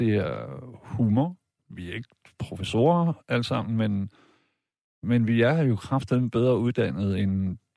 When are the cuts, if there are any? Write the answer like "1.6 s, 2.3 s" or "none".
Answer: 1.6 s